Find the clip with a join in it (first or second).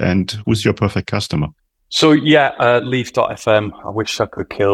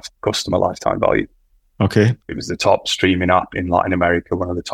second